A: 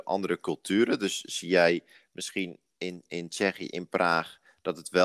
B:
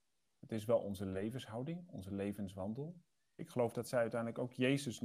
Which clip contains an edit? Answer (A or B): B